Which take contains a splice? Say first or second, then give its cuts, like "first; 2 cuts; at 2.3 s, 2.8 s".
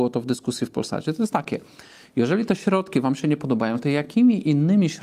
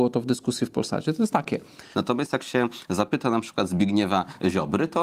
second; 1 cut; at 1.9 s